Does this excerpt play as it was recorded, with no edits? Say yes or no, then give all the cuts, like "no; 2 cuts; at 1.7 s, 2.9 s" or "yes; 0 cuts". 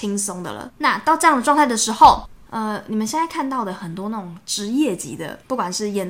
no; 1 cut; at 2.5 s